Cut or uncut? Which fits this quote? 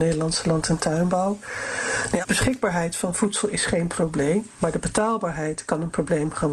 cut